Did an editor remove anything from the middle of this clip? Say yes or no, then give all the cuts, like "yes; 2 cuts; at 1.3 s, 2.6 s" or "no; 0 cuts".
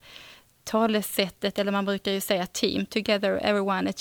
no; 0 cuts